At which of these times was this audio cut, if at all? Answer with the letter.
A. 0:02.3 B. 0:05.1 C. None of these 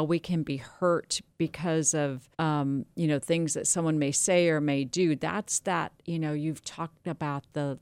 A